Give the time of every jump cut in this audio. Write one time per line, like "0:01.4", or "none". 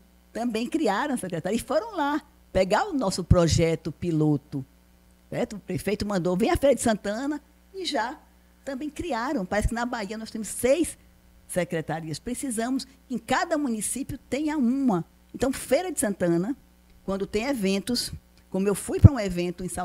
none